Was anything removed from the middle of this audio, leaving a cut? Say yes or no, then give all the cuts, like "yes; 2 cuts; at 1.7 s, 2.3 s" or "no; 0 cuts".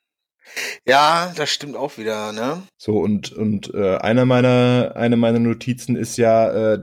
no; 0 cuts